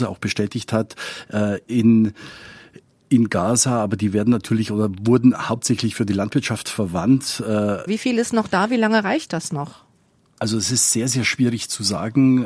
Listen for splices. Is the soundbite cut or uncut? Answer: cut